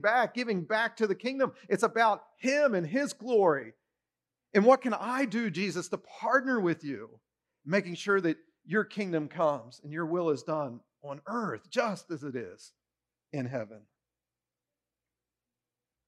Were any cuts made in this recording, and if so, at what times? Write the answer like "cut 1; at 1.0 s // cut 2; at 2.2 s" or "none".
none